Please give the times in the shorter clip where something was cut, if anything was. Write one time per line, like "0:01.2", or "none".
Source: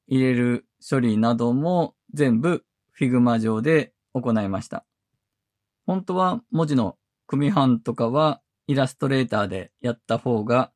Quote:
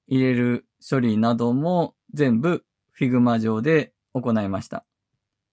none

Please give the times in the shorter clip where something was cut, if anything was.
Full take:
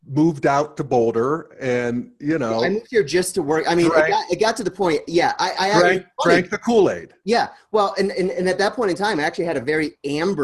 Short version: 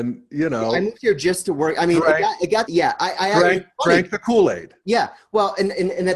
0:02.7

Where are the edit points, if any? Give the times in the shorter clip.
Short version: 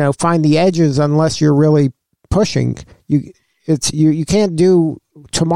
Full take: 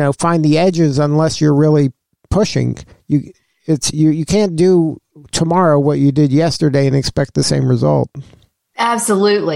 none

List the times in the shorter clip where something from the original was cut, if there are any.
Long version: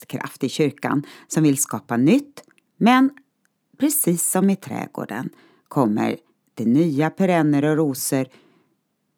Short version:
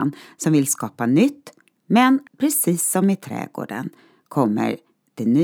0:02.3

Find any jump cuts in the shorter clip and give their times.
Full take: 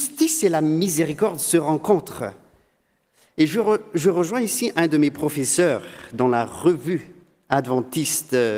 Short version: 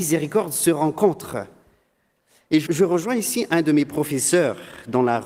0:02.7

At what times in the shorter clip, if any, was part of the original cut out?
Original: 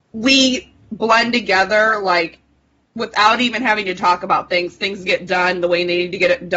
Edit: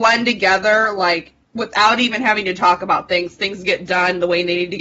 0:01.4

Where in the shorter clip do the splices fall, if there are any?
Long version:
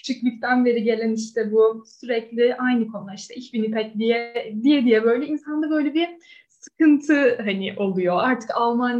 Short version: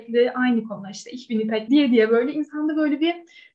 0:01.7

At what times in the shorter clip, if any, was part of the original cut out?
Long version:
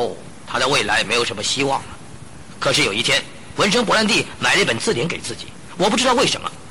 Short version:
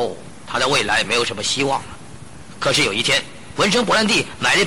none

